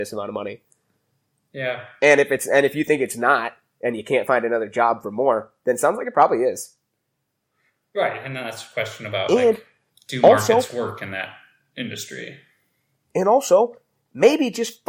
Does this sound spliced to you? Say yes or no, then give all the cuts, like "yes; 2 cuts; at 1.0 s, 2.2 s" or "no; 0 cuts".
no; 0 cuts